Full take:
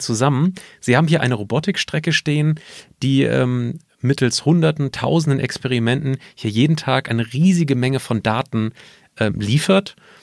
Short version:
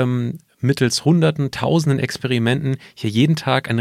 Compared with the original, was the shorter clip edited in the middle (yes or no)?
no